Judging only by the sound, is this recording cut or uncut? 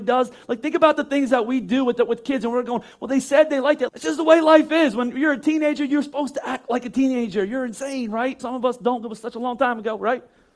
cut